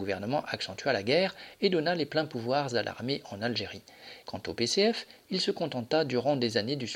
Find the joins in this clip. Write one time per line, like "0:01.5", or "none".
0:04.2